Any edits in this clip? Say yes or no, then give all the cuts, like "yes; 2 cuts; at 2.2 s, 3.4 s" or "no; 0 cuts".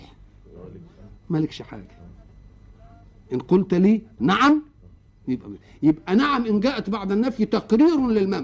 yes; 1 cut; at 4.2 s